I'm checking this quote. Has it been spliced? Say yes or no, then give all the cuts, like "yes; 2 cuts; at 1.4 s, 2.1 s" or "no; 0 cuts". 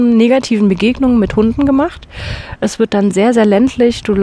no; 0 cuts